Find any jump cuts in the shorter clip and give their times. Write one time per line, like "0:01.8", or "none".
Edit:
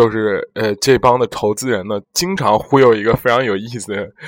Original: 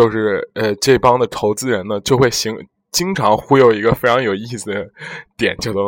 0:02.0

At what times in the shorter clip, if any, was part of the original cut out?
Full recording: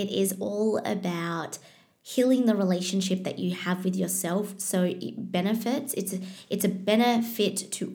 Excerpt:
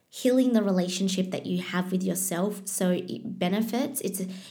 none

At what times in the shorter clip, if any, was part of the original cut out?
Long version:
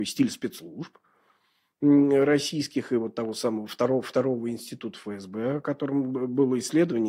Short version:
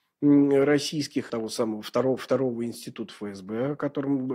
0:01.3

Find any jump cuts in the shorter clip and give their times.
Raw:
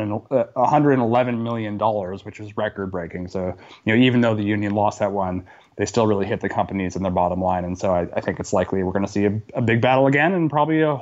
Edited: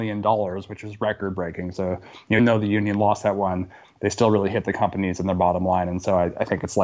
0:02.4

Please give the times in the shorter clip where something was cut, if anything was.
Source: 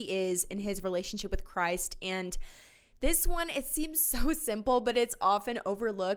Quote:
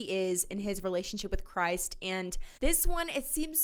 0:02.6

